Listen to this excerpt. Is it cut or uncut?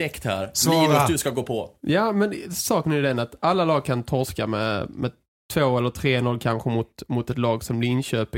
uncut